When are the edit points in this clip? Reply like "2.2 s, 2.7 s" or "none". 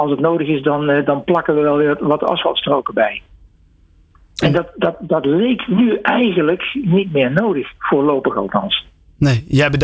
none